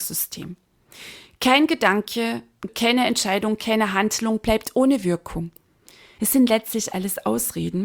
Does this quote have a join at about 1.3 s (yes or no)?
no